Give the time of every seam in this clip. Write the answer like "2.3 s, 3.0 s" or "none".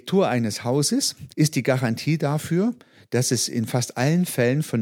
1.3 s